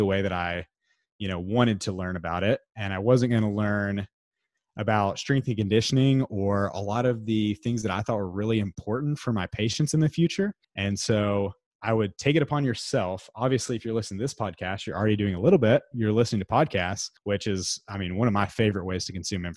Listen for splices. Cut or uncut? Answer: uncut